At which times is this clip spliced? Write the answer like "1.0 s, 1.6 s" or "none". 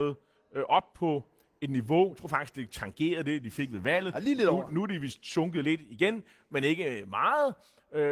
none